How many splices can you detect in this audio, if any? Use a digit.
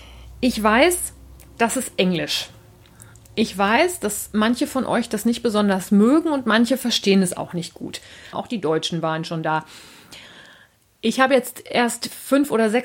1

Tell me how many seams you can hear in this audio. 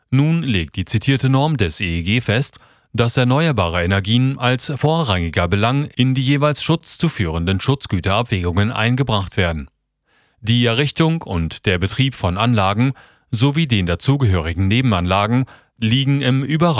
1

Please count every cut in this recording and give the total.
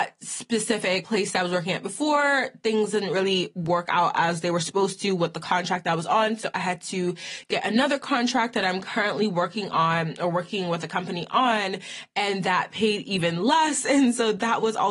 0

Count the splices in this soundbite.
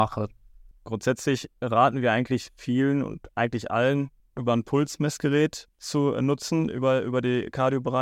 0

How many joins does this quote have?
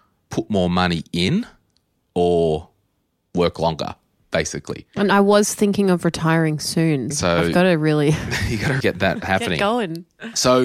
2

